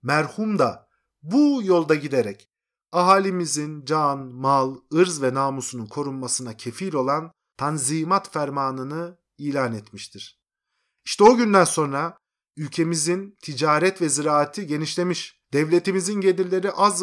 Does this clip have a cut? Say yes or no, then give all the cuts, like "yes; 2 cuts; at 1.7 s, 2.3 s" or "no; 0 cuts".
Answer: no; 0 cuts